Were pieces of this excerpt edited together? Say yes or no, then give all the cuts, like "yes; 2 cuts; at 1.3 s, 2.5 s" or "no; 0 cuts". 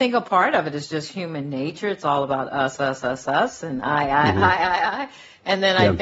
yes; 1 cut; at 2.8 s